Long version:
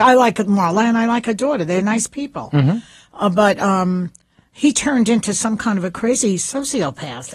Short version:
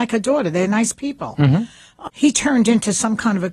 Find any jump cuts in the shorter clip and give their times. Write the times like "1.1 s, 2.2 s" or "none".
2.1 s